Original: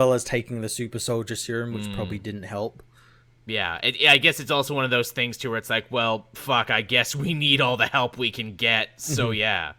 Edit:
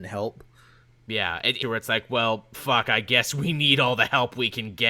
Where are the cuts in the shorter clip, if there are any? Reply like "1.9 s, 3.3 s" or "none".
1.6 s